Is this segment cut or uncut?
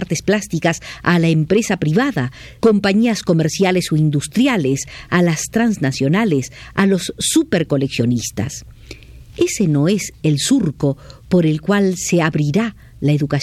cut